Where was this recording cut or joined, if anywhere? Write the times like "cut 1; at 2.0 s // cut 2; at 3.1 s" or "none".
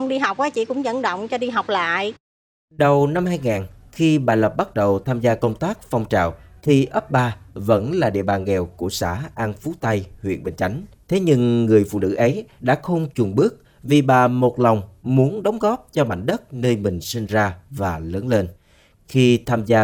cut 1; at 10.9 s